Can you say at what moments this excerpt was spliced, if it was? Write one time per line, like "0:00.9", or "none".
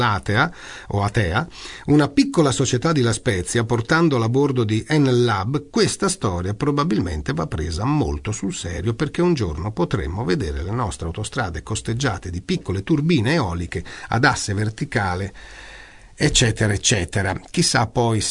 none